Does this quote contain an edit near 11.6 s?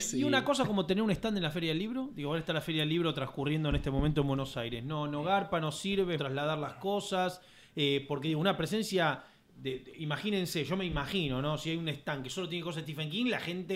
no; 1 cut; at 6.2 s

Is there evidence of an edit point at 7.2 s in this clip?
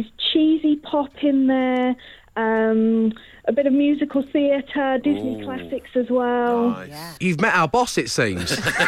yes; 1 cut; at 7.2 s

